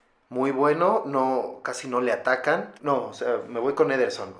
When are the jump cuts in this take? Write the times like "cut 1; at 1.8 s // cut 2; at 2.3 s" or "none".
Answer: cut 1; at 2.8 s